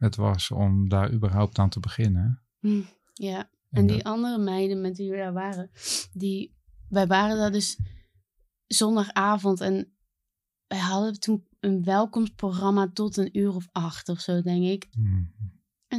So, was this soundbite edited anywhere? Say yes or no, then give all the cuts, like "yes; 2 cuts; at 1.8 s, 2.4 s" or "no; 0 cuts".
yes; 2 cuts; at 11.6 s, 14.9 s